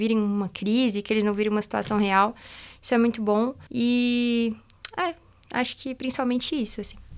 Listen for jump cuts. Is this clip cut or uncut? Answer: cut